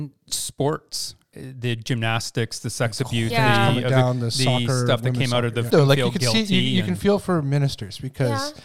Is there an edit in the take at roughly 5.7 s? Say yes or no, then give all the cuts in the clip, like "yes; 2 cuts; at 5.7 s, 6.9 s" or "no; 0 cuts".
yes; 3 cuts; at 1.3 s, 3.3 s, 5.7 s